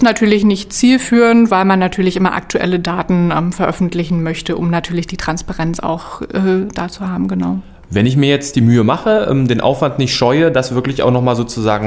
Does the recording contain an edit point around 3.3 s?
no; 0 cuts

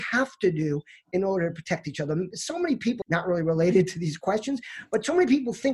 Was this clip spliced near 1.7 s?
no; 1 cut; at 3.0 s

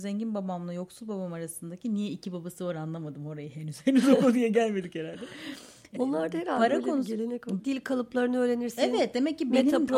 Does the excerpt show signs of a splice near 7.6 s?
yes; 2 cuts; at 6.0 s, 7.6 s

